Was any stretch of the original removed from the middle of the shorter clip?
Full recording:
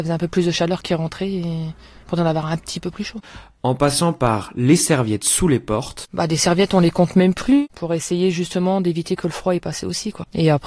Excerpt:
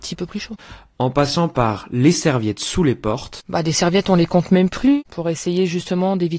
no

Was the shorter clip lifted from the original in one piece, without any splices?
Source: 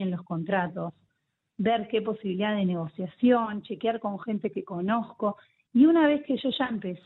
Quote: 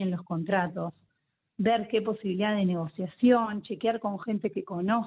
yes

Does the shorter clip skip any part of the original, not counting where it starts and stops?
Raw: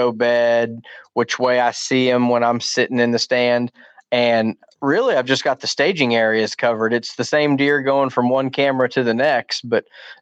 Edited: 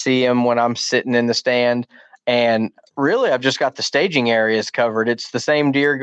no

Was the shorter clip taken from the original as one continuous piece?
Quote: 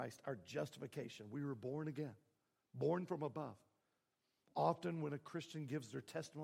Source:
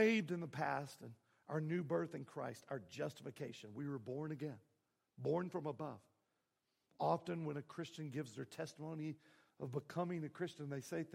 yes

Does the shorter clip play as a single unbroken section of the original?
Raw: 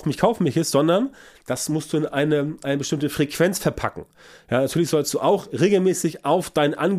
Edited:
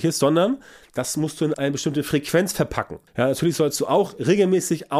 no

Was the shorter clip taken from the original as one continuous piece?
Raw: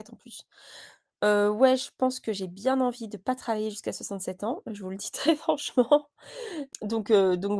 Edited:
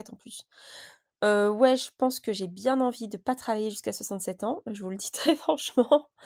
yes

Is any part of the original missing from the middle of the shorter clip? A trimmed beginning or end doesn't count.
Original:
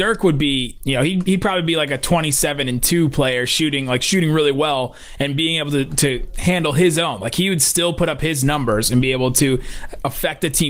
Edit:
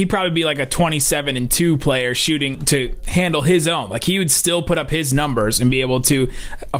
yes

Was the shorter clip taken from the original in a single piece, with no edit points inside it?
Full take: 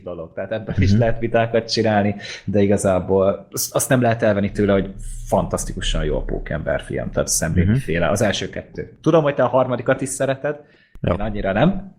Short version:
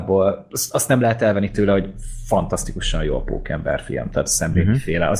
yes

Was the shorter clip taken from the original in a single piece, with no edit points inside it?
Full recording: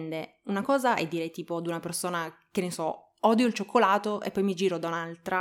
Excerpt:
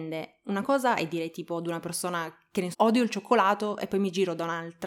no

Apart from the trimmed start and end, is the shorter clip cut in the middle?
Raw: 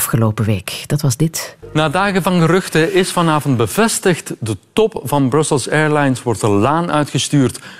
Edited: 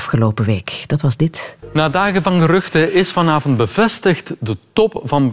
no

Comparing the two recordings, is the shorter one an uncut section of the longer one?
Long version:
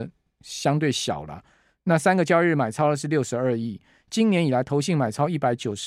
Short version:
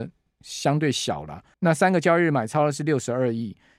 no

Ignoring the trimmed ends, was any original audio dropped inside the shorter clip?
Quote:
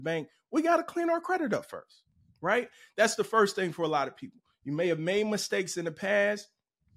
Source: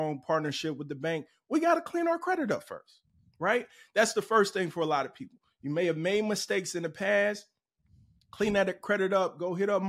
no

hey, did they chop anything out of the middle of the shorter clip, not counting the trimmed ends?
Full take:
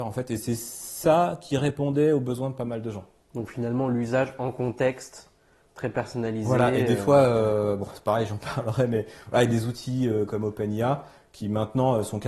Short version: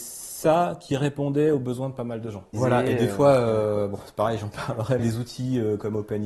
yes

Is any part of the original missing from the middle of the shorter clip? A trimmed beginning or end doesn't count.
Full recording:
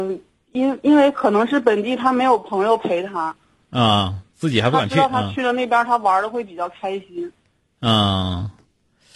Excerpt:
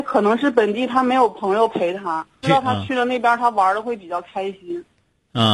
yes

